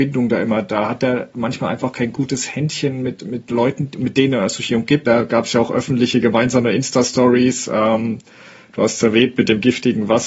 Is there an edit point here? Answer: yes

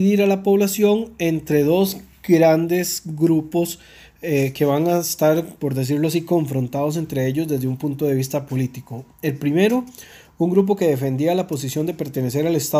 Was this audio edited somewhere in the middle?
no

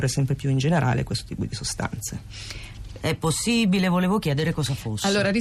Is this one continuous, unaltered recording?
no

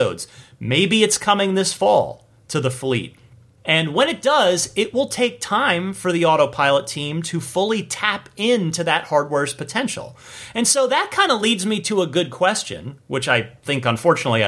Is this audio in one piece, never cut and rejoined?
no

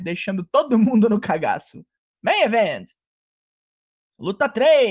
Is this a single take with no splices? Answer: yes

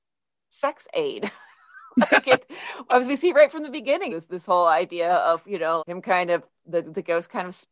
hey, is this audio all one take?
no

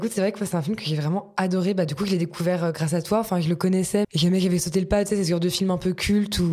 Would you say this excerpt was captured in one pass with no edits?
no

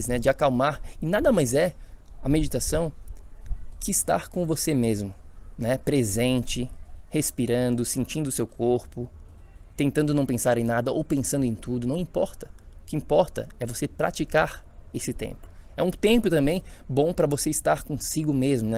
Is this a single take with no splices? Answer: yes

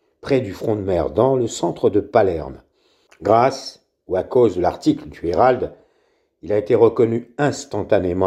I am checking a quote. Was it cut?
yes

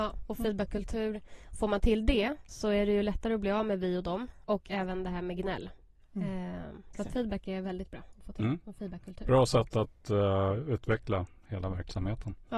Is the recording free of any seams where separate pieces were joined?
no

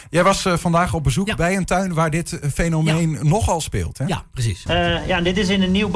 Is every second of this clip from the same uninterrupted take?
no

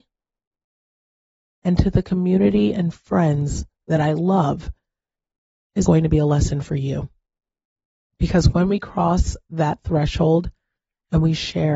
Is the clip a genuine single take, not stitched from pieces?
no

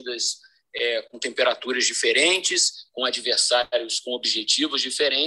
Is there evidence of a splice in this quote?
no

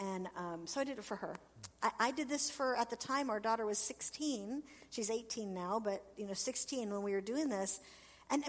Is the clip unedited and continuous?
no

